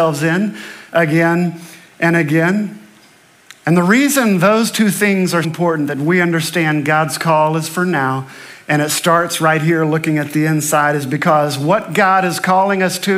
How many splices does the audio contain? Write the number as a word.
one